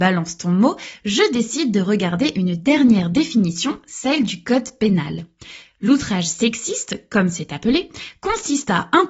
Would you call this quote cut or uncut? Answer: uncut